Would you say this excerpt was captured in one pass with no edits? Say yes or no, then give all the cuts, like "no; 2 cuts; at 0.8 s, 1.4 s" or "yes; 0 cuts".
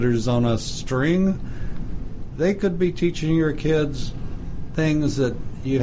yes; 0 cuts